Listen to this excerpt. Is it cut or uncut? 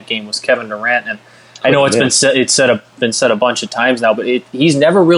uncut